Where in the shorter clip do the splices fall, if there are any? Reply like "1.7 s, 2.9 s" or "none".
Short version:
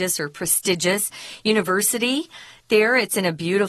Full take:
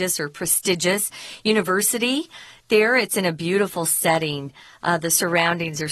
none